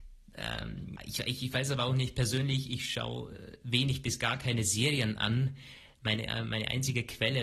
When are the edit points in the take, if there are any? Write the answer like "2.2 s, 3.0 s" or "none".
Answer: 1.0 s

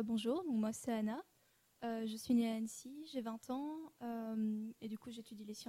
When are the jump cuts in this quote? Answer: none

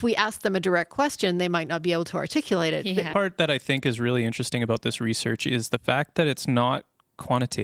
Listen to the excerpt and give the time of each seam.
3.1 s

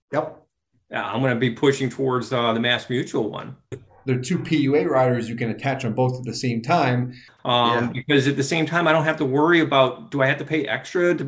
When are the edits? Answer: 3.7 s, 7.3 s

